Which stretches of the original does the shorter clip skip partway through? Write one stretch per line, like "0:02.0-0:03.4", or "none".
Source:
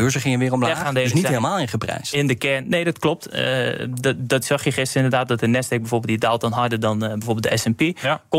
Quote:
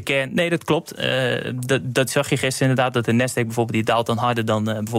none

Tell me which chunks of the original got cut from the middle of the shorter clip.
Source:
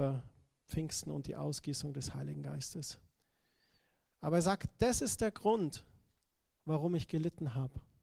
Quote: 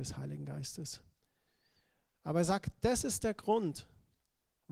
none

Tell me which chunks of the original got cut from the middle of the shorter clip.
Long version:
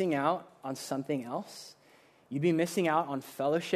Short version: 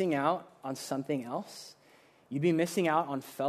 none

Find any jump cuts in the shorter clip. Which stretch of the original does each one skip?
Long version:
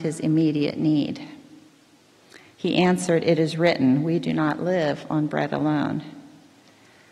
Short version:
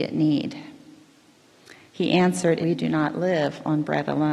0:03.2-0:04.0

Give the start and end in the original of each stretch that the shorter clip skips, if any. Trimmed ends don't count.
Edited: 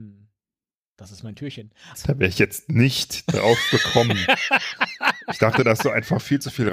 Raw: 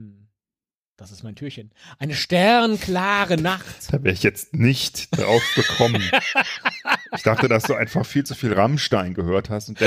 0:01.9-0:03.8

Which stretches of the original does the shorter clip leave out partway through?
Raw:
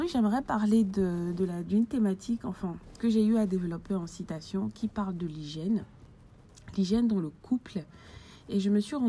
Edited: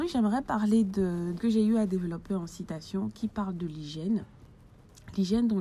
0:01.4-0:03.0

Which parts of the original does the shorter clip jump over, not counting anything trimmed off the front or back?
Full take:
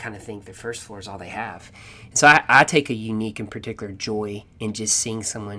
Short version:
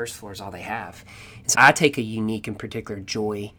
0:02.2-0:02.5

